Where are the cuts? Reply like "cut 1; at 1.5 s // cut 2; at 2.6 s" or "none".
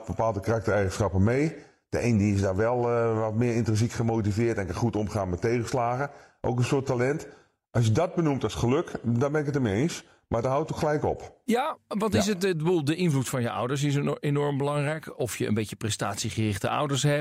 none